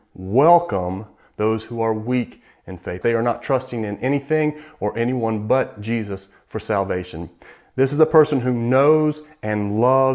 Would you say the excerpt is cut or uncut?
cut